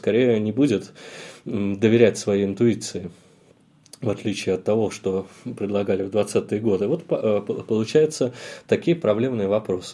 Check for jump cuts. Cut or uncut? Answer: uncut